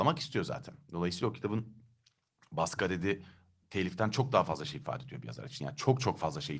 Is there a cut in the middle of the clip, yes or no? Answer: no